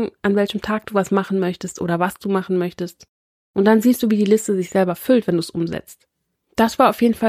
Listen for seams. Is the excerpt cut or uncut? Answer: uncut